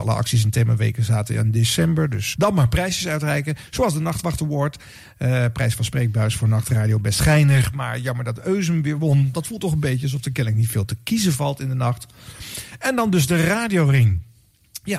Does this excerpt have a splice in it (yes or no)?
yes